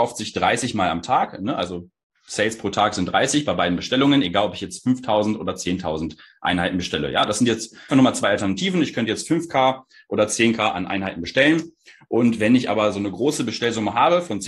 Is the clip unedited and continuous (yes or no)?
no